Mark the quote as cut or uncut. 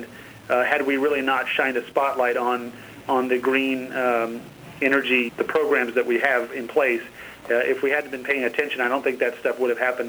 cut